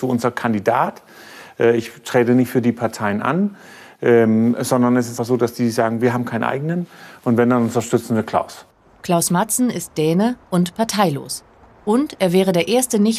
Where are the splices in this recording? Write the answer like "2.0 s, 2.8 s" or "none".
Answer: 5.2 s